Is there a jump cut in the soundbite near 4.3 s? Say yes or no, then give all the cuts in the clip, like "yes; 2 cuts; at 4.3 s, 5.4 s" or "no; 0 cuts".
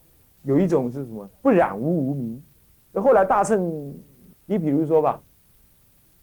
yes; 1 cut; at 4.3 s